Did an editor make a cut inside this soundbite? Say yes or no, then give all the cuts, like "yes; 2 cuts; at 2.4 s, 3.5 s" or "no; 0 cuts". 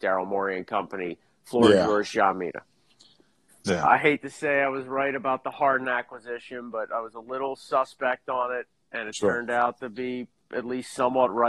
yes; 1 cut; at 3.5 s